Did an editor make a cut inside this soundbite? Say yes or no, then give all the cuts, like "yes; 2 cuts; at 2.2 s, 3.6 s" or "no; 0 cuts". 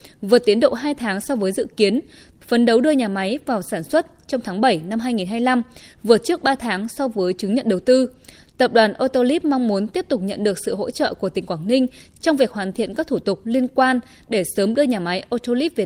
yes; 1 cut; at 2.4 s